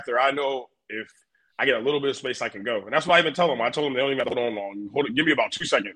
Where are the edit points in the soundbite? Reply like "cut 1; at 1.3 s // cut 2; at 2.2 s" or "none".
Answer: none

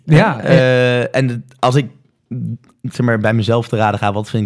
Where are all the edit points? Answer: none

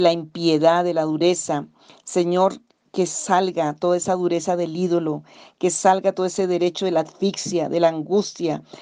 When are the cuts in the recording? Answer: none

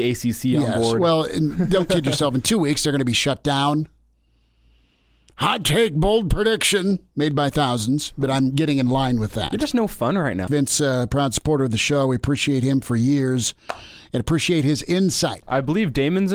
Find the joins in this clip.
cut 1; at 10.5 s // cut 2; at 15.4 s

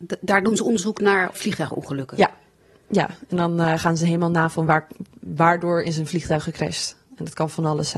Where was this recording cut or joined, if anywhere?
cut 1; at 1.3 s

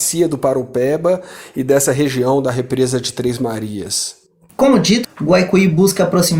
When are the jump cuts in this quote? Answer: cut 1; at 5.0 s

